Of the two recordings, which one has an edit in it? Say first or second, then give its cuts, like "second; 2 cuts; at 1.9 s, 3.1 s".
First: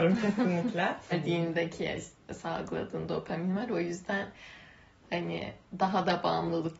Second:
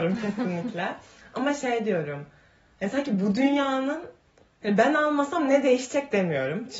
first; 1 cut; at 1.1 s